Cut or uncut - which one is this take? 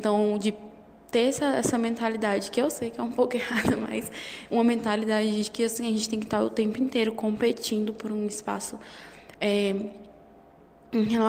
uncut